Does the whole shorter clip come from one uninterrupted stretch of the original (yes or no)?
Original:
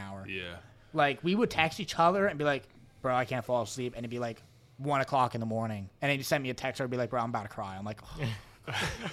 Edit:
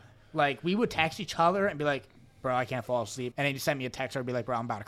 no